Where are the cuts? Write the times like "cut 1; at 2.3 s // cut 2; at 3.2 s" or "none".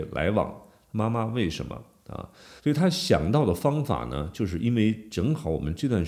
cut 1; at 2.6 s